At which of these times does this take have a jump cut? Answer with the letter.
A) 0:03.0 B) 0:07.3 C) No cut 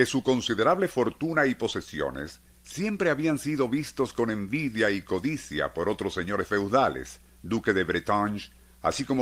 B